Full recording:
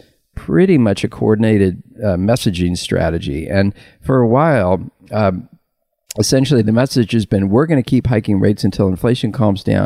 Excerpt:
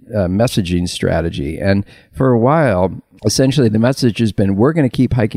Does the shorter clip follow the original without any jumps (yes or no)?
no